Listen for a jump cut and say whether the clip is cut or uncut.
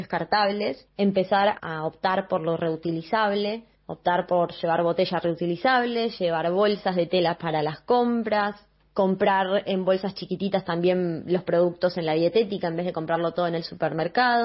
cut